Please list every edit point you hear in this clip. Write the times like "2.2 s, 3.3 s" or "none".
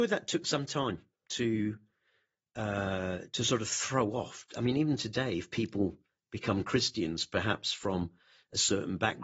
none

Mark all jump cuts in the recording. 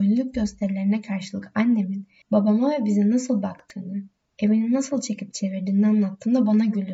2.2 s

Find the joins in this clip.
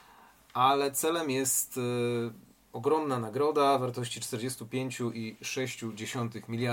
none

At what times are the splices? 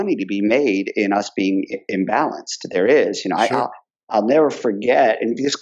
none

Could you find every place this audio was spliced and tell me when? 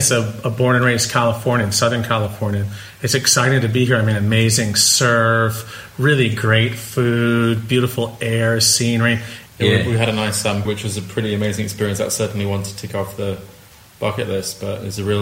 9.5 s, 10.6 s

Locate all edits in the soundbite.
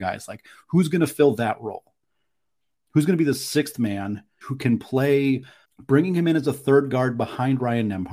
4.4 s, 5.6 s

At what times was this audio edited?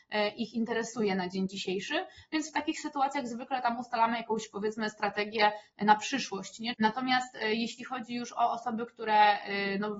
6.7 s

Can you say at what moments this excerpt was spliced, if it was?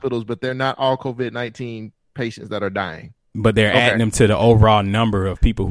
3.3 s

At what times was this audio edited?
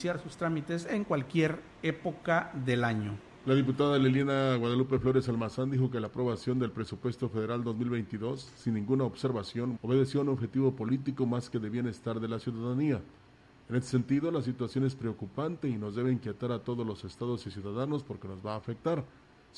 9.8 s

